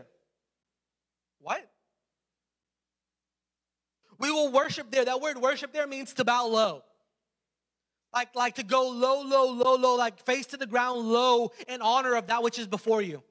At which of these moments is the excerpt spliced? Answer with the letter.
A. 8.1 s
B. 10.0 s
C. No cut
C